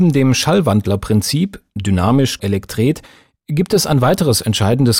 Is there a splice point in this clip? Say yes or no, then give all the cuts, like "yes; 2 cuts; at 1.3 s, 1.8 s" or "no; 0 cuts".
yes; 1 cut; at 2.4 s